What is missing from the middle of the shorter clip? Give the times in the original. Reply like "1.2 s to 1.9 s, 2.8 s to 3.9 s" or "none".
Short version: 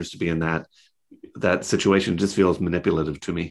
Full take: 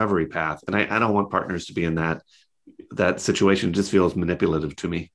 none